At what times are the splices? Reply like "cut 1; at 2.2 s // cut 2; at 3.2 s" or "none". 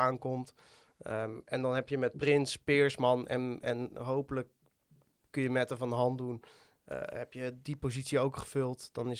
none